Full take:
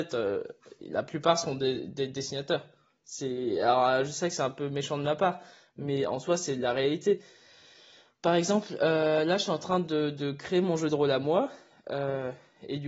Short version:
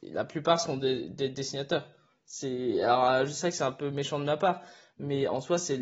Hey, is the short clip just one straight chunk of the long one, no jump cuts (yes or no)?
yes